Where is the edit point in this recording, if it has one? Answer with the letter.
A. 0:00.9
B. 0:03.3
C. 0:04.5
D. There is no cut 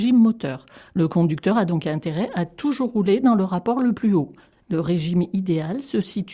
C